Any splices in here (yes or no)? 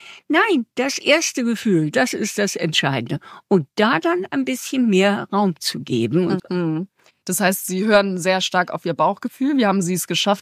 yes